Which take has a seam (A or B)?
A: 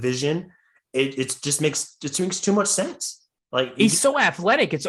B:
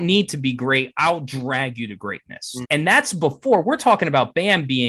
B